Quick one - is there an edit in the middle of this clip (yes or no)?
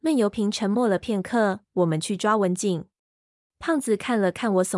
yes